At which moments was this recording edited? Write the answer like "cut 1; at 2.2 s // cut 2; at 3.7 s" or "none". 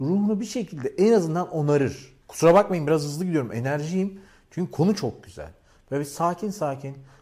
none